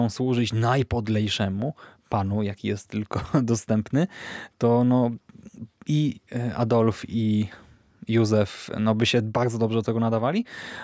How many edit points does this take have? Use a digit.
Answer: 1